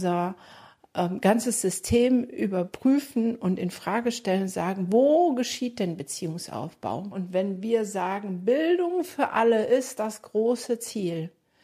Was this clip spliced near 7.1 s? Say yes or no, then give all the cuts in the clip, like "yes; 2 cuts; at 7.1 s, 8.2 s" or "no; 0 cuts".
yes; 1 cut; at 7.1 s